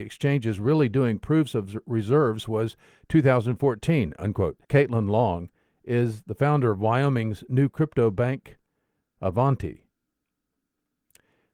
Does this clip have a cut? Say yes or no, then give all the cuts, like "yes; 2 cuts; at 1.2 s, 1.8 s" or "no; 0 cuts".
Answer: yes; 1 cut; at 4.6 s